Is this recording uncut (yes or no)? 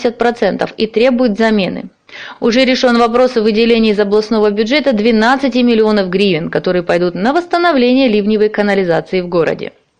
yes